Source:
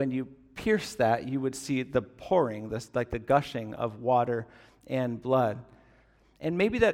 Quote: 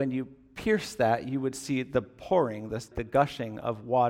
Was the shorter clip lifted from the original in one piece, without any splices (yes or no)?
no